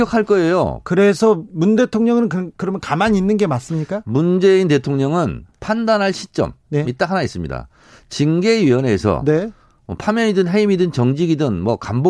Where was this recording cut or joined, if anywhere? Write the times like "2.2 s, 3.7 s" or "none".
1.5 s